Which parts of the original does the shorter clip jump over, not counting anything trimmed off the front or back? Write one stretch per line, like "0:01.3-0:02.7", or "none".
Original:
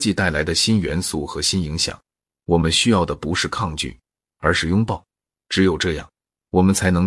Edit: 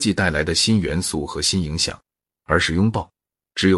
0:02.3-0:04.3